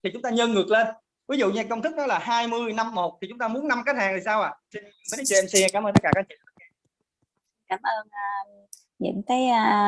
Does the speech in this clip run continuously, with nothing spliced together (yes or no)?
no